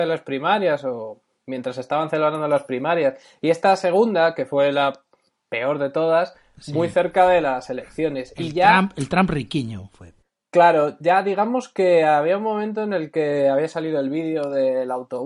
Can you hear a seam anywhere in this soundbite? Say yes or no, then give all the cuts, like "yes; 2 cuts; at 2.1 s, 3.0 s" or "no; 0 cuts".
no; 0 cuts